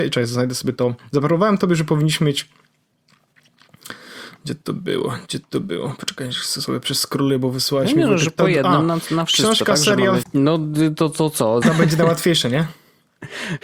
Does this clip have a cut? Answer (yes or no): yes